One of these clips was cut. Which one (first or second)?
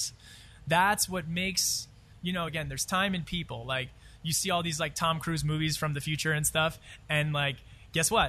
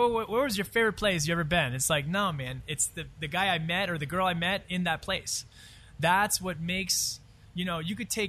first